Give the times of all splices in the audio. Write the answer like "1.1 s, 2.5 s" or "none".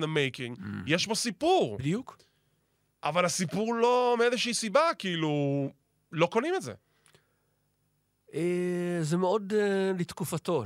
none